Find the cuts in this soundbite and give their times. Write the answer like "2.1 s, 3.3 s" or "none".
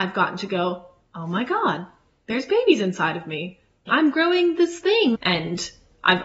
3.9 s, 5.2 s

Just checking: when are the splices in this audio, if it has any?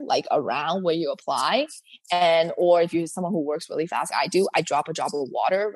4.1 s

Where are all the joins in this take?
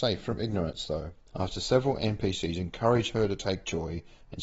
1.3 s

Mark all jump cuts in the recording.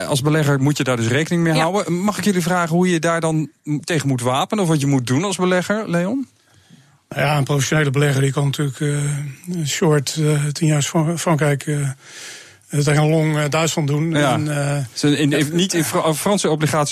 none

